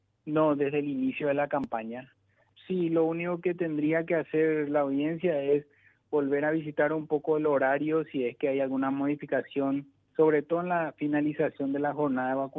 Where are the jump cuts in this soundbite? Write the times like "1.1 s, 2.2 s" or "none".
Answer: 2.5 s